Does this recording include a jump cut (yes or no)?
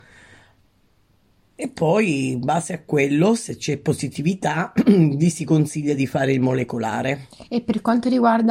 no